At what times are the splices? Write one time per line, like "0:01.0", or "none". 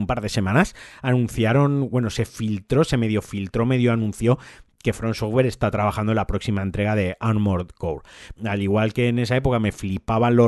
0:08.4